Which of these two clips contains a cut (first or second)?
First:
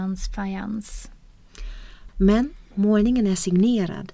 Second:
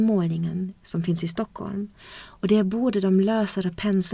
first